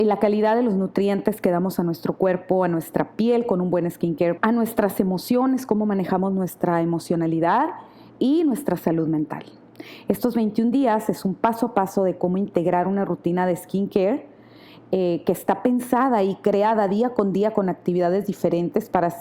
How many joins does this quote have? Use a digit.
1